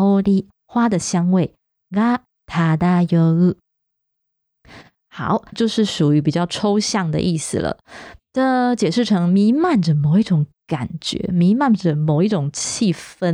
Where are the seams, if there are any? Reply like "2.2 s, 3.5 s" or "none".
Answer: 5.5 s